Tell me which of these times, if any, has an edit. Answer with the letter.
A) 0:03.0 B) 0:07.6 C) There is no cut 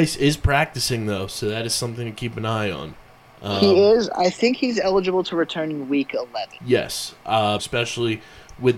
B